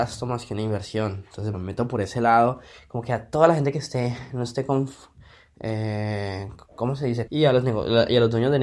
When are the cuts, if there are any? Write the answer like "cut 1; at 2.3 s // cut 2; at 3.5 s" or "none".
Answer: cut 1; at 1.5 s // cut 2; at 7.3 s